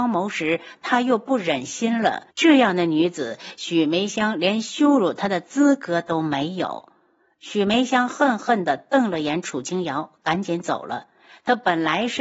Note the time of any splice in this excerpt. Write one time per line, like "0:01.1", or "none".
0:02.3